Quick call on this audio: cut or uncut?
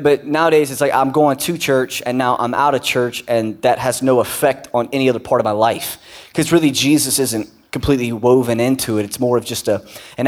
uncut